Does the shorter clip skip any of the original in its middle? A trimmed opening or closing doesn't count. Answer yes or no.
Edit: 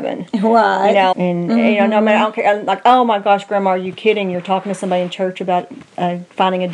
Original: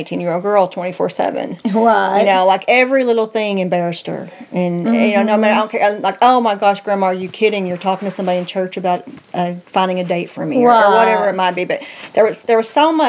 yes